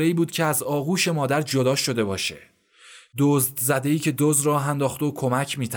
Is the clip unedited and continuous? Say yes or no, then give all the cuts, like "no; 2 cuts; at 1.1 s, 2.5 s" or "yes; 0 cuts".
no; 1 cut; at 4.2 s